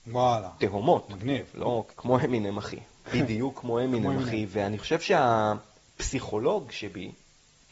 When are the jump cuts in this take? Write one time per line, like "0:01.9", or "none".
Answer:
0:01.9